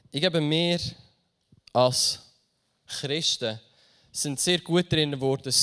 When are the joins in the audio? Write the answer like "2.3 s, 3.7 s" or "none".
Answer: none